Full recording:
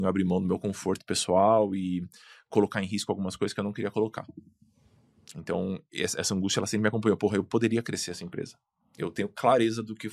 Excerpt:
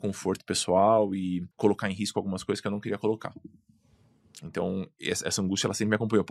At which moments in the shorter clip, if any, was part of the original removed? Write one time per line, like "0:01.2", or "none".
0:01.5